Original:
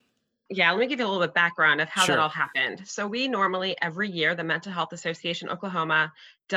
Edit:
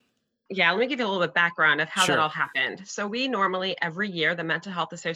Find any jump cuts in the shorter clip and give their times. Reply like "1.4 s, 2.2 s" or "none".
none